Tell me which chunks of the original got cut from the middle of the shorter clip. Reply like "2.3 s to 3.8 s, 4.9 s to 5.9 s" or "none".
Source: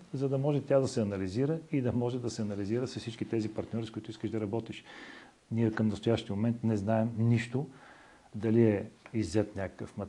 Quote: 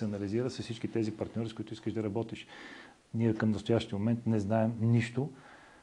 none